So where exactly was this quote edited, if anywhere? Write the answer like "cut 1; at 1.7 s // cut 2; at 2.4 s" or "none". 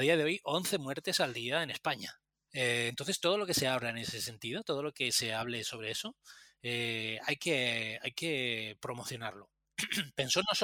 cut 1; at 2.5 s